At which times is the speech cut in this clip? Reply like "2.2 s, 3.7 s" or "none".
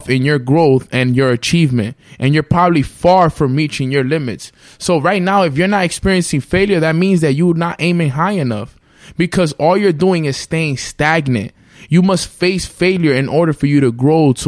none